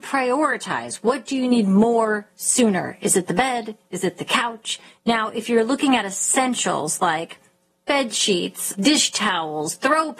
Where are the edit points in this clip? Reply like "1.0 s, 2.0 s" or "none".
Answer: 4.9 s, 8.7 s